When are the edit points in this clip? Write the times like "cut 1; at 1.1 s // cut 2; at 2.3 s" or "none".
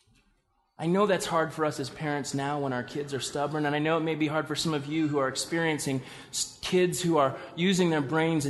none